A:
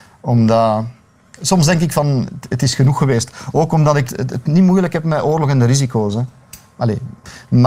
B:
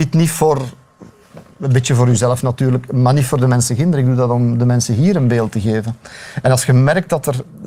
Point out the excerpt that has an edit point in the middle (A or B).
A